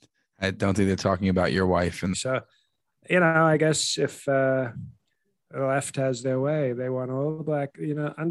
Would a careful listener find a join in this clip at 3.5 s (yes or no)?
no